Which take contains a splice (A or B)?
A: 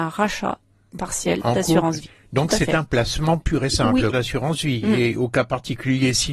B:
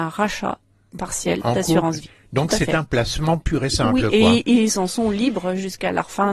A